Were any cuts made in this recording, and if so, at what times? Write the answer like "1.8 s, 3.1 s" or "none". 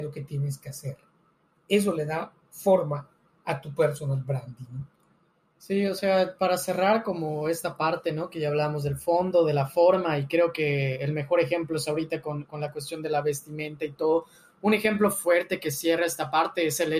none